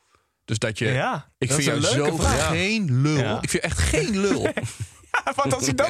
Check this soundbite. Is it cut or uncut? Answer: cut